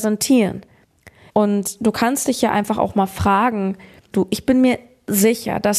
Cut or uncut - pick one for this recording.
cut